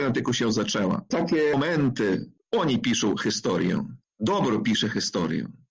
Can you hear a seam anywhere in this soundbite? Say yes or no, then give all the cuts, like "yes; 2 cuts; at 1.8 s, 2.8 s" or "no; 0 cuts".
no; 0 cuts